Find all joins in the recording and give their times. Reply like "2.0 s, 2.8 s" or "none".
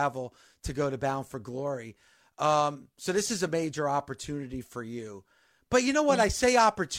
none